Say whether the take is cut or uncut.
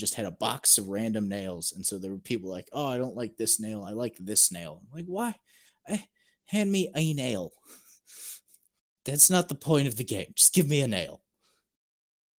uncut